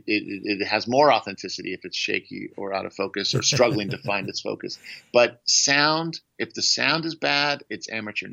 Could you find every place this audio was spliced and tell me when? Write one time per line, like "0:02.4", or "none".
none